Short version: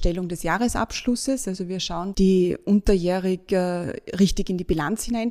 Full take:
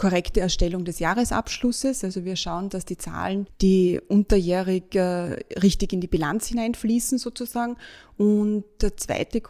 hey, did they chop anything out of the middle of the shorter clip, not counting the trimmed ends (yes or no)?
yes